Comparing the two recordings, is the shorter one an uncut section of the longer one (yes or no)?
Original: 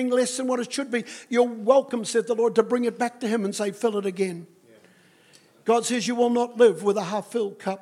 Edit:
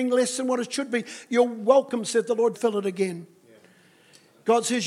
no